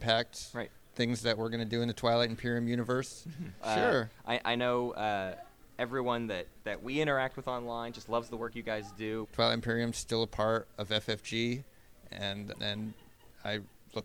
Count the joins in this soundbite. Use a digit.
3